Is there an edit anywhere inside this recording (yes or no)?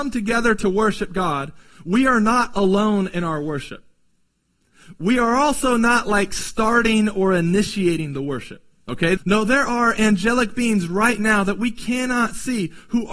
yes